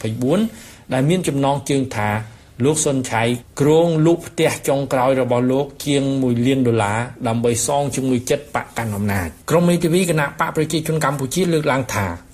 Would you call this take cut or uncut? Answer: cut